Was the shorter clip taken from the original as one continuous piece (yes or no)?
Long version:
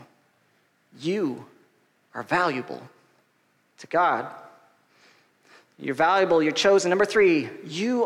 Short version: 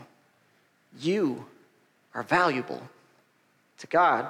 yes